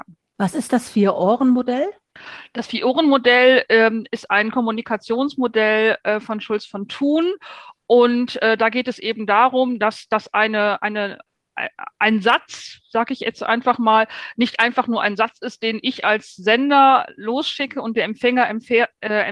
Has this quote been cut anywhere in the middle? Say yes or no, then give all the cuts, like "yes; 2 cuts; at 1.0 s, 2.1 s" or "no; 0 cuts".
no; 0 cuts